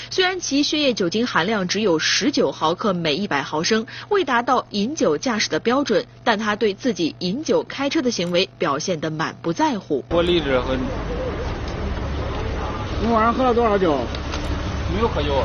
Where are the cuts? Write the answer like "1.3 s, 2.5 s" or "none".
none